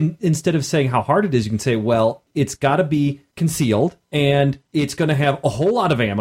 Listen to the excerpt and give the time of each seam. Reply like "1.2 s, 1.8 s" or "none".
4.0 s

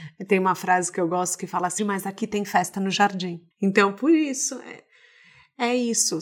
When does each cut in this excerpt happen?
1.8 s, 3.5 s

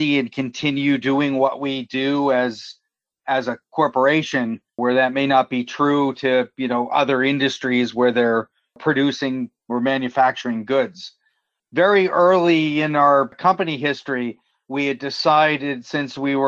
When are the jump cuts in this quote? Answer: none

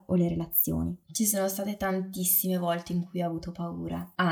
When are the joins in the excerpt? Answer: 1.0 s

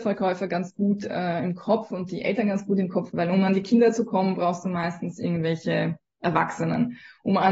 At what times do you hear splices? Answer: 3.1 s

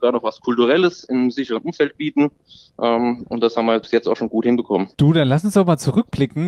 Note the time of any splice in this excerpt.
4.9 s

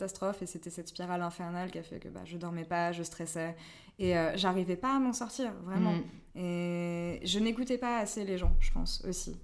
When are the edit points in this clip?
none

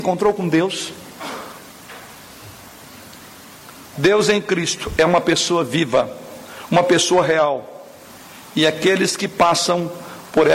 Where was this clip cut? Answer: none

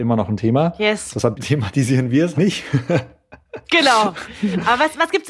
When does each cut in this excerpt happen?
2.3 s

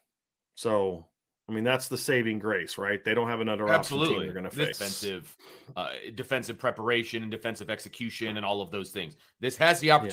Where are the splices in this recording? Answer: 4.7 s

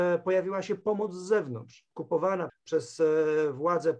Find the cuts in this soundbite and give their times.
2.5 s

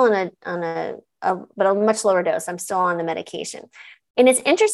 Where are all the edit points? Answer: none

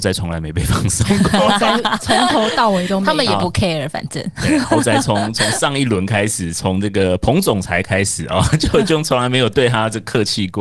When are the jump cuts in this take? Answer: none

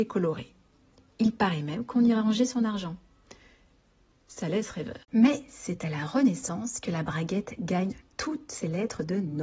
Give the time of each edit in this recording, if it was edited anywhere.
none

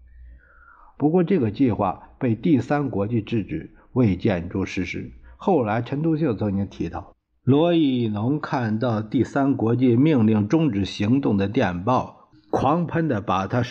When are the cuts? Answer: 1.0 s

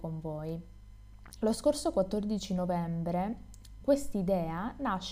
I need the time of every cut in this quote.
1.4 s, 3.8 s

